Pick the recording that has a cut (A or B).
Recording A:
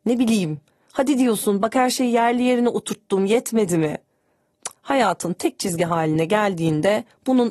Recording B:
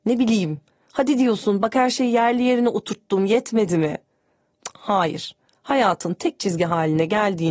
A